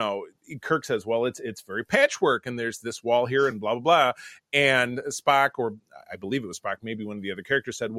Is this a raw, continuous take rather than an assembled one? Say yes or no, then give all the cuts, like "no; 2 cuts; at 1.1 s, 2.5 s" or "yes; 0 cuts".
yes; 0 cuts